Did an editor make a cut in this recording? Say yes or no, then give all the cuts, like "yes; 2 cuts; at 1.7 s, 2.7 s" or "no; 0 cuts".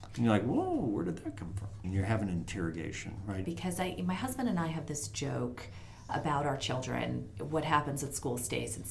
yes; 3 cuts; at 1.8 s, 3.4 s, 6.1 s